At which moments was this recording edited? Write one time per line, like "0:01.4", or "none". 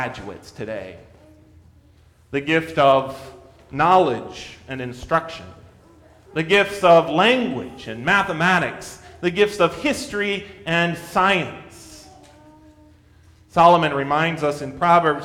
none